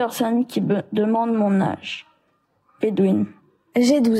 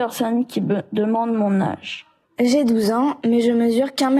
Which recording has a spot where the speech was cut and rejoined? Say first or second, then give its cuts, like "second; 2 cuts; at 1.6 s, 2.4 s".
second; 1 cut; at 2.2 s